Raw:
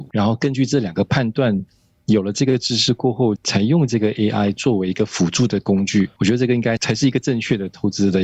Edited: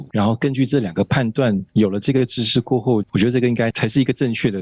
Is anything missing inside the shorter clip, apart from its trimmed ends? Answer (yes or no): yes